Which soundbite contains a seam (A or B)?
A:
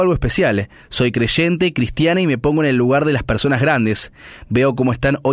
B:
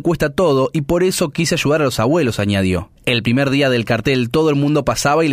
B